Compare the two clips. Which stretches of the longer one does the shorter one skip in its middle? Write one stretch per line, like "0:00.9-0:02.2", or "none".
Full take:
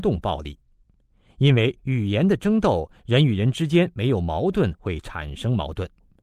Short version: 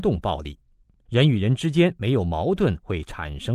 0:01.1-0:03.0